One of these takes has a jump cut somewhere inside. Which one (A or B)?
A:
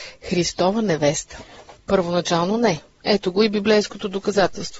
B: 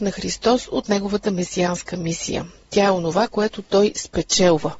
A